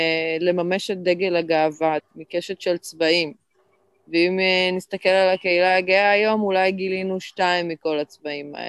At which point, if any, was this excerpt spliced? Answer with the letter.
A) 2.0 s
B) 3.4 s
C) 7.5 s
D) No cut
A